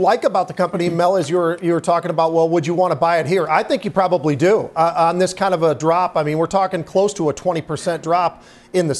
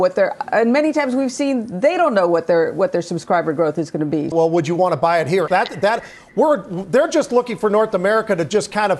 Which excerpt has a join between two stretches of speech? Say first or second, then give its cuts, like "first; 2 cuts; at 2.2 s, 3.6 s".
second; 2 cuts; at 4.3 s, 5.5 s